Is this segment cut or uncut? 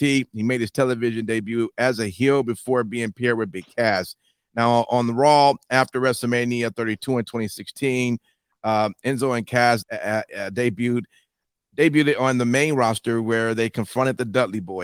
cut